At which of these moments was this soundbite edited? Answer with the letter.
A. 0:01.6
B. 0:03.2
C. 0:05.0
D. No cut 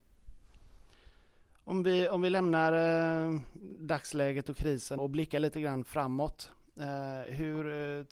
C